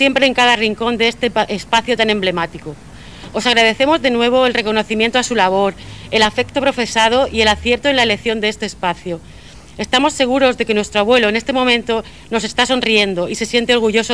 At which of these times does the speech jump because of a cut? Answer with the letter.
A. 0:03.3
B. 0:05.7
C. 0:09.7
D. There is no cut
D